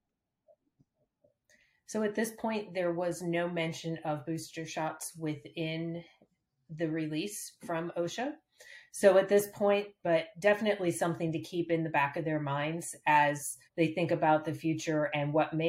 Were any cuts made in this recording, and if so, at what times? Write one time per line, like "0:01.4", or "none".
0:10.0
0:13.7